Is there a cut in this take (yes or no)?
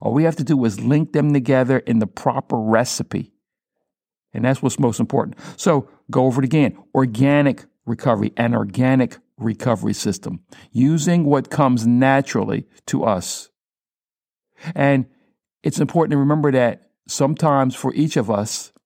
no